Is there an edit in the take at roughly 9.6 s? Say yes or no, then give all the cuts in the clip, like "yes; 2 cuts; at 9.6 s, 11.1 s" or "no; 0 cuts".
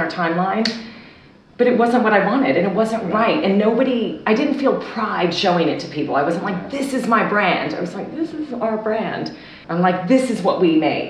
yes; 1 cut; at 9.6 s